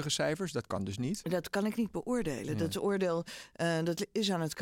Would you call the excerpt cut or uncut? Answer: uncut